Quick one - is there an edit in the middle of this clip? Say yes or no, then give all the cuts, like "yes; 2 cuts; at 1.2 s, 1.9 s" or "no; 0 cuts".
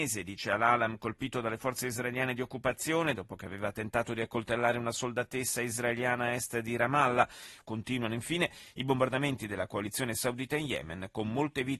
yes; 1 cut; at 7.6 s